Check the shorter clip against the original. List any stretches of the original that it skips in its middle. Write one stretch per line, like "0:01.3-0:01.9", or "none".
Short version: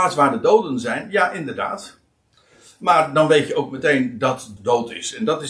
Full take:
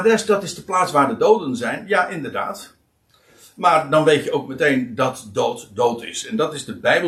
0:05.3-0:05.7